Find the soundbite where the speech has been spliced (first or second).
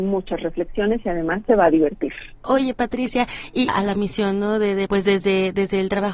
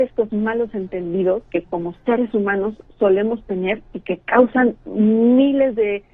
first